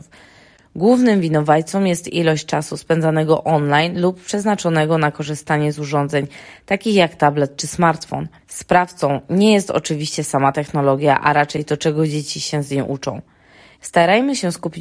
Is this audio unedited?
no; 1 cut; at 13.7 s

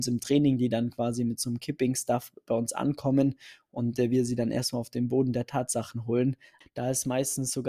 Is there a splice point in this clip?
yes; 1 cut; at 6.6 s

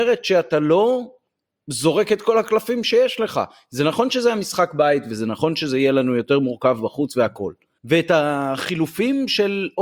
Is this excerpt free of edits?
no; 1 cut; at 7.8 s

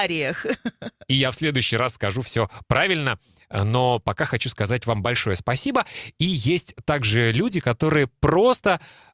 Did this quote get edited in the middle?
no; 0 cuts

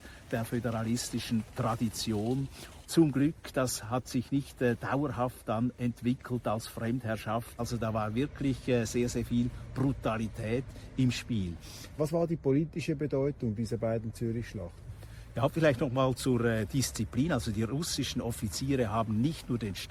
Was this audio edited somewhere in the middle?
yes; 3 cuts; at 2.8 s, 7.6 s, 12.0 s

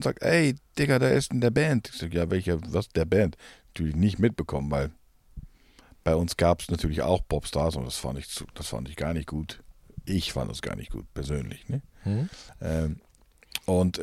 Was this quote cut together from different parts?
no; 0 cuts

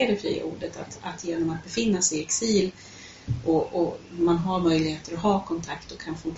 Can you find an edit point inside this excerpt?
no; 0 cuts

